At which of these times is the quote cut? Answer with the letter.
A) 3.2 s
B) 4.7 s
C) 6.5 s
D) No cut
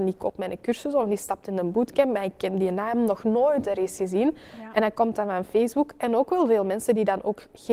D